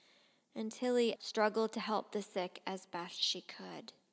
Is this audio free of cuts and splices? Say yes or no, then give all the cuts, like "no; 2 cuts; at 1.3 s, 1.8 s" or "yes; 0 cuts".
no; 1 cut; at 1.2 s